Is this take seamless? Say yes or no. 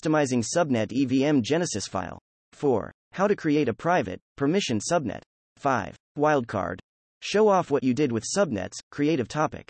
yes